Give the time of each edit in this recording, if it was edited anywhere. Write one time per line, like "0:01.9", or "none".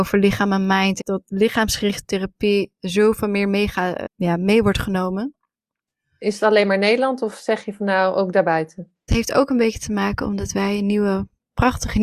0:01.0
0:04.1
0:09.1

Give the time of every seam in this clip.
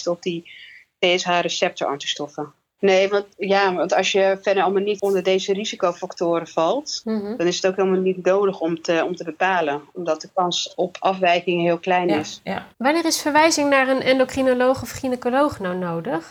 0:02.8
0:12.7

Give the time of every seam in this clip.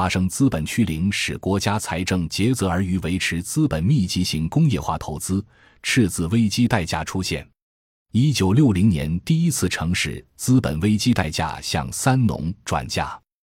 none

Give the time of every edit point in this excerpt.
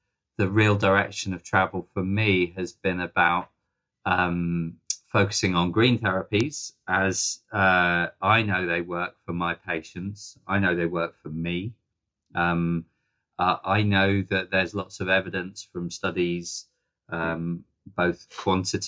none

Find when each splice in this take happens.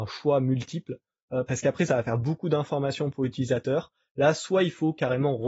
none

